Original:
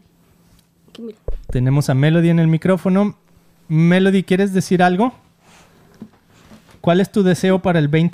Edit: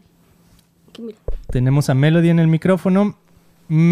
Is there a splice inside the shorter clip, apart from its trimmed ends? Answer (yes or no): no